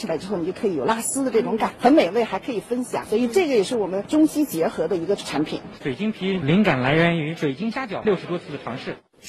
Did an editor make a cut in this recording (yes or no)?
yes